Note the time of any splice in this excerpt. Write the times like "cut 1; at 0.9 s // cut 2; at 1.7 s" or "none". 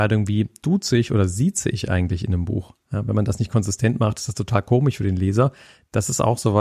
none